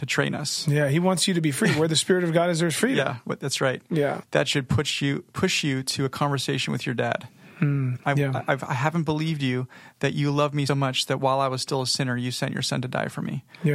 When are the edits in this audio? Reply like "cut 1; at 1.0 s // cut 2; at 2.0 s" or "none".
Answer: cut 1; at 4.2 s // cut 2; at 8.0 s // cut 3; at 10.7 s